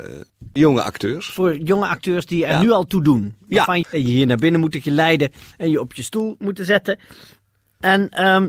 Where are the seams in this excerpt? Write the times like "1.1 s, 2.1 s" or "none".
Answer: 3.8 s